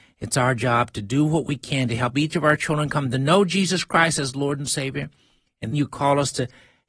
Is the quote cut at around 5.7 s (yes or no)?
yes